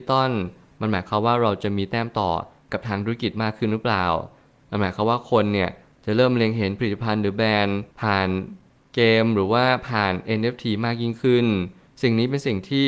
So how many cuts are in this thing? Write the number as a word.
one